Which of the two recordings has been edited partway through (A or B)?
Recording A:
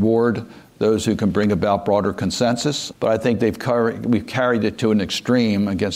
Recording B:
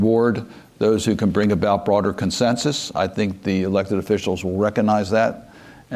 A